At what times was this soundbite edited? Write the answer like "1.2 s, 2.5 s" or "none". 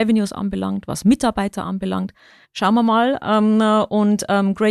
2.4 s